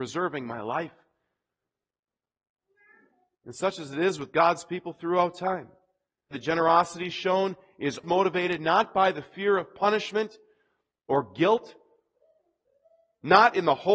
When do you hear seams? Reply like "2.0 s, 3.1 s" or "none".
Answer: 6.3 s, 8.0 s